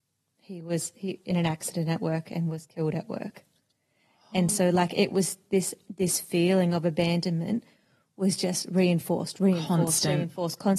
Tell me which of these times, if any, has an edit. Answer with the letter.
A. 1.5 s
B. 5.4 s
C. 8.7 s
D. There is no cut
D